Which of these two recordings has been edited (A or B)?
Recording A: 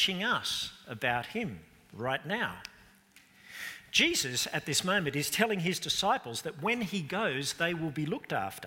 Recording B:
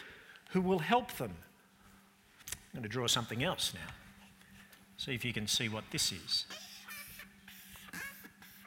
B